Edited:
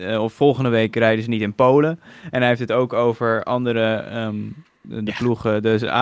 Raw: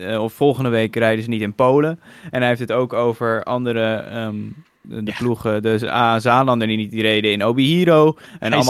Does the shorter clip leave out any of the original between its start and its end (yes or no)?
no